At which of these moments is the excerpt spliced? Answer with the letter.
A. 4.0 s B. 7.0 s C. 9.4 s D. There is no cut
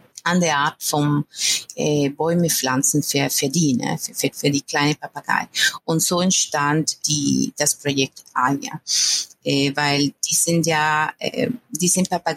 B